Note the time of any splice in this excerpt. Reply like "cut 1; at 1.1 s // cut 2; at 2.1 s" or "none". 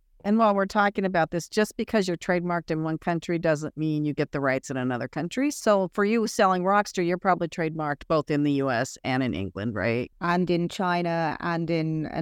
none